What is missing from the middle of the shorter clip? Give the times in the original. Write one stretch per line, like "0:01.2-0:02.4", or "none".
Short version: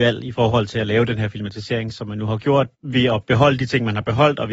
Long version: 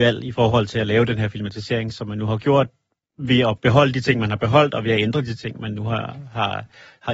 0:02.7-0:03.1